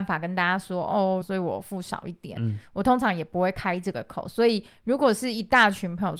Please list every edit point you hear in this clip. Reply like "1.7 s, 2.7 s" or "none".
1.2 s